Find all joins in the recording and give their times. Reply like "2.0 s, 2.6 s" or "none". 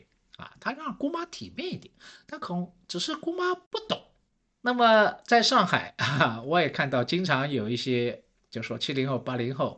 2.4 s